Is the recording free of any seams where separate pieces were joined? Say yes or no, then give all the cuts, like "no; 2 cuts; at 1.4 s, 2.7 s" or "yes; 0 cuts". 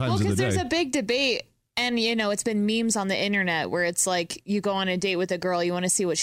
yes; 0 cuts